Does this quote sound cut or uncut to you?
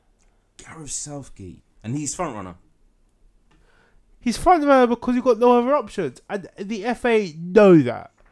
cut